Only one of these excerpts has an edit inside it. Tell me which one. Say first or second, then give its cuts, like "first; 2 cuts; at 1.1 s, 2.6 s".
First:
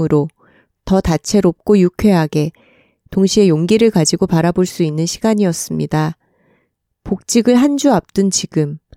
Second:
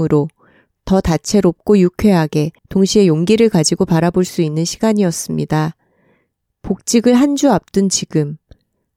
second; 1 cut; at 2.6 s